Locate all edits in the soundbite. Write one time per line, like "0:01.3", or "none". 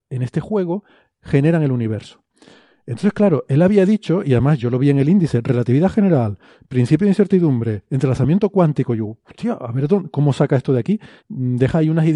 0:11.2